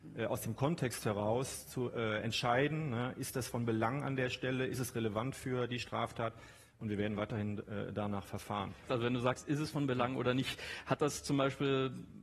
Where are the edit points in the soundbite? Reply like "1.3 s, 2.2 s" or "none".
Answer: 8.9 s